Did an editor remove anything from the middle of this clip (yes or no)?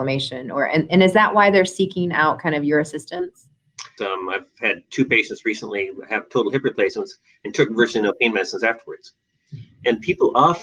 yes